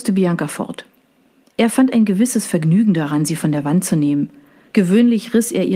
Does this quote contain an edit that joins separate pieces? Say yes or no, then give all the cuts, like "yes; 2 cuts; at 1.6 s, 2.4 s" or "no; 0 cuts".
yes; 1 cut; at 4.7 s